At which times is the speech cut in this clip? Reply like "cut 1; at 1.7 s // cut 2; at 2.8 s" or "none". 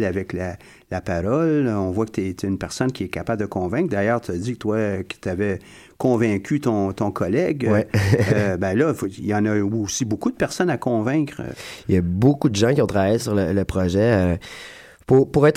none